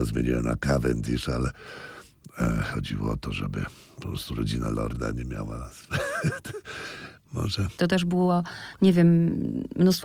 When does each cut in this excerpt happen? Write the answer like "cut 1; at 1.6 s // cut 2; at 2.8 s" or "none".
cut 1; at 7.8 s